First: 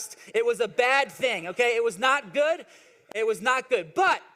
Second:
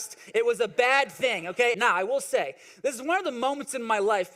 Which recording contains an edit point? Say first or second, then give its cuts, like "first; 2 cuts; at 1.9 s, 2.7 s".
second; 1 cut; at 1.7 s